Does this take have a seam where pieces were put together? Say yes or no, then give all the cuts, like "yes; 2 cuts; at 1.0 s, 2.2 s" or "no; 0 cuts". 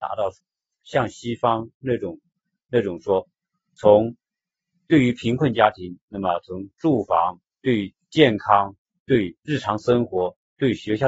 yes; 2 cuts; at 7.5 s, 9.4 s